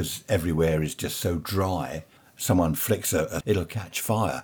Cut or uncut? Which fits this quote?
cut